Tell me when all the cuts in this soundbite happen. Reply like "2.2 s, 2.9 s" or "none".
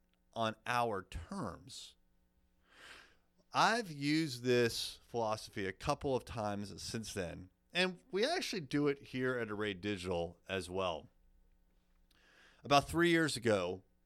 none

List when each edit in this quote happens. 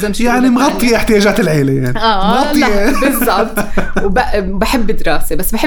none

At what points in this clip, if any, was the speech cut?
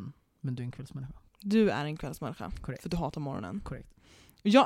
1.3 s

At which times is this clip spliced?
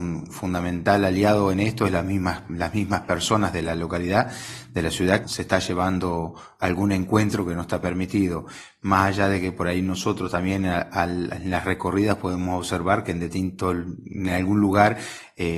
5.2 s

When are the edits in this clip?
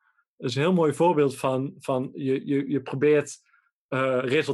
none

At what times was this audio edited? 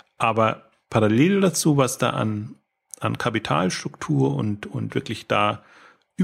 none

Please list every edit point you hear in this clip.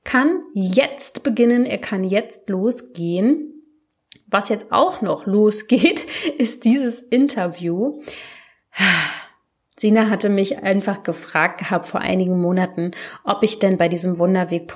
none

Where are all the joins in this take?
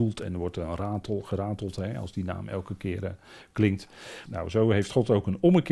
4.3 s

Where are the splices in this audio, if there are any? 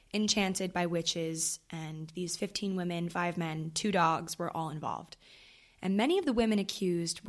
none

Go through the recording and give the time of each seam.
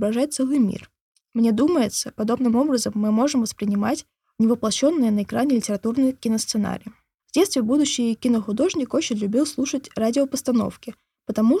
7.2 s

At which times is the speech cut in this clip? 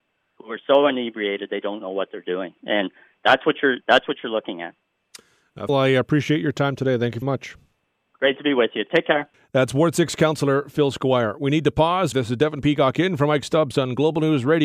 5.7 s, 7.2 s, 12.1 s

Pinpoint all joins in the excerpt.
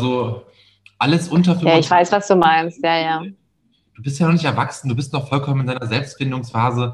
none

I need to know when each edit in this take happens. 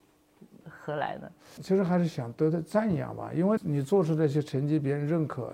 3.6 s

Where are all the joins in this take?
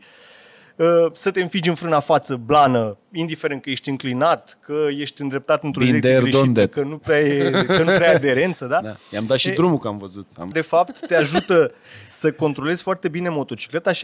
10.5 s

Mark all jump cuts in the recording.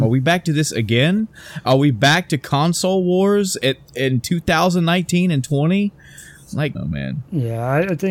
6.7 s

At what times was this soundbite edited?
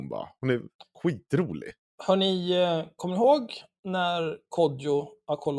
none

